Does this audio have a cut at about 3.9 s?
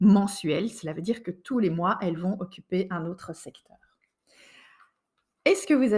no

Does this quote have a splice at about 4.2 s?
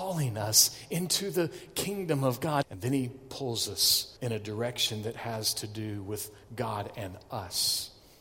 yes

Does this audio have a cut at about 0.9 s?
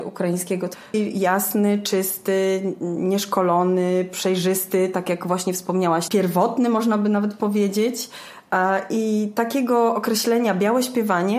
yes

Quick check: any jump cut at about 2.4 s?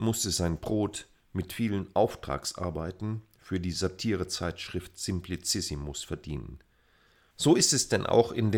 no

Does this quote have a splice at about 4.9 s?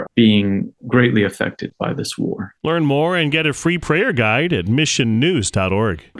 no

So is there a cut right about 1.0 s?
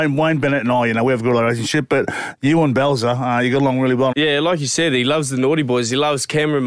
no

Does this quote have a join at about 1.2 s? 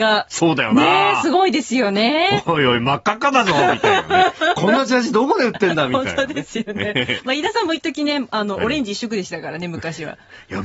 no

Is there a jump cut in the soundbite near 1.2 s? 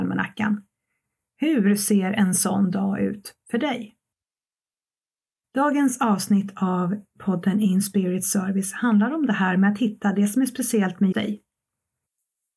no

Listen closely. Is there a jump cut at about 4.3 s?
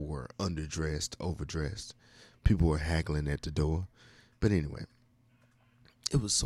yes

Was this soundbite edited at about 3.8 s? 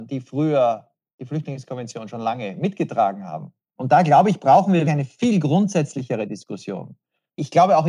yes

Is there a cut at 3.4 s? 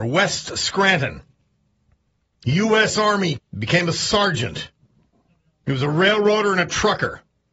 yes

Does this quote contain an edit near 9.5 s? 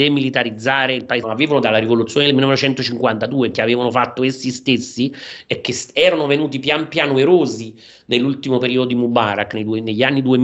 no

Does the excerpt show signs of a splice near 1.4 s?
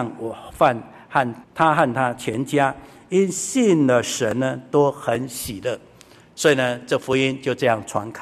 yes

